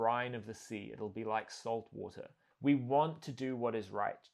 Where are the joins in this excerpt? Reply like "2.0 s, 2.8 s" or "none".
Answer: 2.5 s